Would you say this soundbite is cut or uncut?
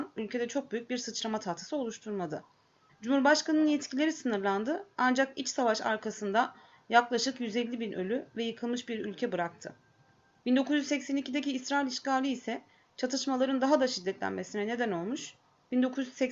cut